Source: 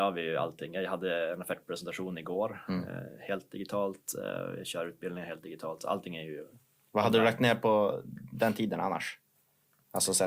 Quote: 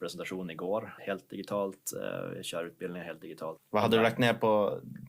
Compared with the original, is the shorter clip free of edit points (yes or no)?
no